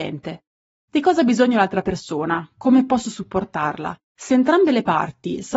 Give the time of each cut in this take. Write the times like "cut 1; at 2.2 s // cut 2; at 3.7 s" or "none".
cut 1; at 4.0 s